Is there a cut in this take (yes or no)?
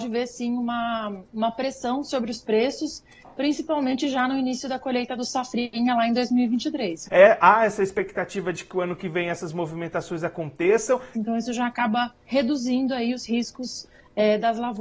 yes